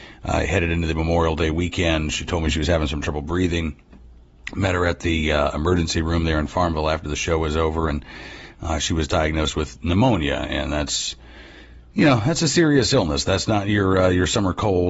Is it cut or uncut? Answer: uncut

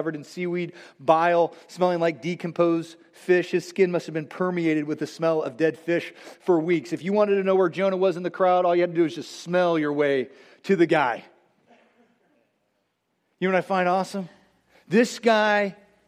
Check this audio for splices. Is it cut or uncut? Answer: uncut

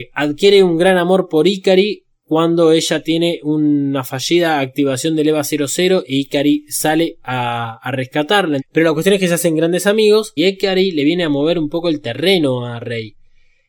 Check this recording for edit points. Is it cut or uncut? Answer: cut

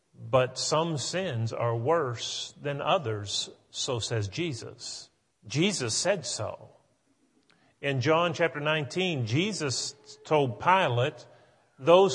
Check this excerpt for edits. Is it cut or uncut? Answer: cut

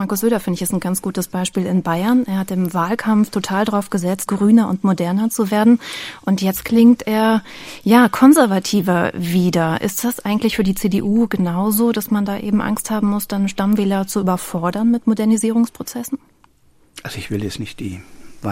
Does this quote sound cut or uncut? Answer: cut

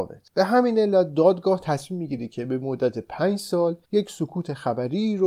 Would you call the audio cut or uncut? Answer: uncut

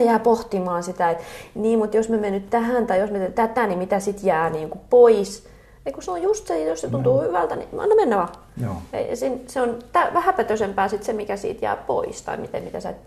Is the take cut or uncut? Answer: uncut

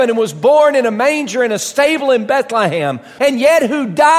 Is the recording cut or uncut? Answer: cut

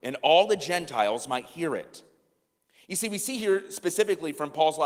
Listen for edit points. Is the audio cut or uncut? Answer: uncut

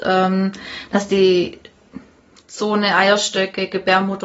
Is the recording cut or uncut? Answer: uncut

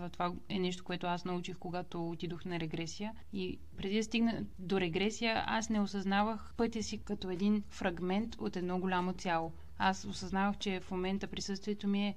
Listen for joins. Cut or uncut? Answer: uncut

